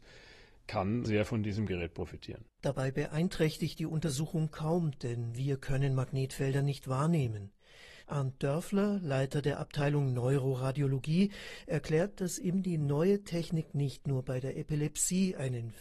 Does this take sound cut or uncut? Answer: cut